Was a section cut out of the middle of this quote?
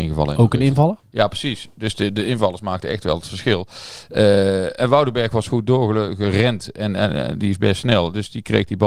no; 0 cuts

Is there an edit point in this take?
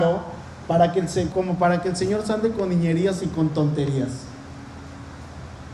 yes; 1 cut; at 1.3 s

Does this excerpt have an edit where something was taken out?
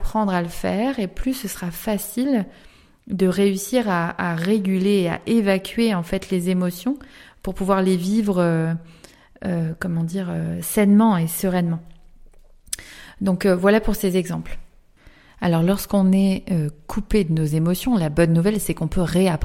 no; 0 cuts

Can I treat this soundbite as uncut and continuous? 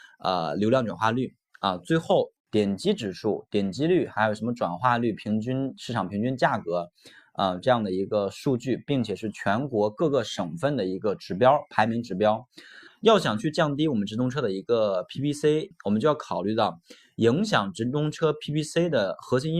no; 3 cuts; at 2.4 s, 12.9 s, 15.7 s

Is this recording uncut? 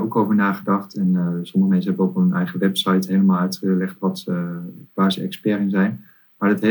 yes; 0 cuts

